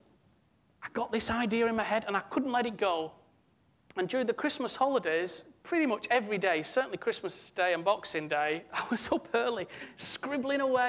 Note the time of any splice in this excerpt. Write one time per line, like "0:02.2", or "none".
none